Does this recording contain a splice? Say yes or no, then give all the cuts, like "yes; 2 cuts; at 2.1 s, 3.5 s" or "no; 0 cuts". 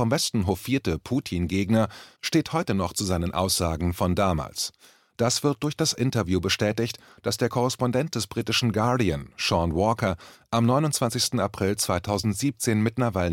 no; 0 cuts